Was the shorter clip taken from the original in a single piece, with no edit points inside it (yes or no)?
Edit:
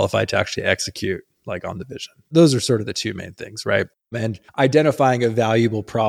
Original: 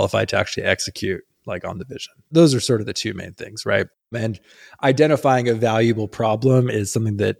no